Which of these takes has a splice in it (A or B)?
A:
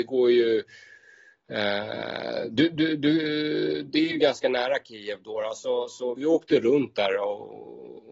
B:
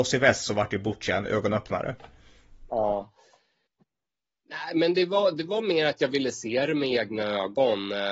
A